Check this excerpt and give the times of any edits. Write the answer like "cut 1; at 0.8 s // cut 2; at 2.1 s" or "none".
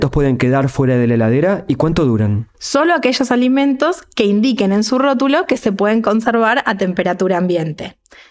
cut 1; at 2.5 s